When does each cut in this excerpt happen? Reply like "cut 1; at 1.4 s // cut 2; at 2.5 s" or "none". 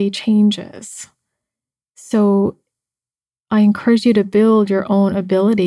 none